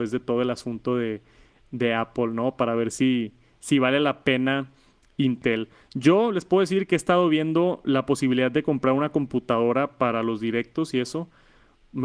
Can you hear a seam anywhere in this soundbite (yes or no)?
no